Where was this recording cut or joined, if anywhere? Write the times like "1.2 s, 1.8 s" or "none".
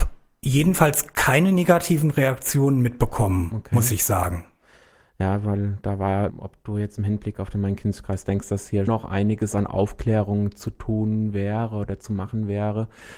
6.3 s, 8.9 s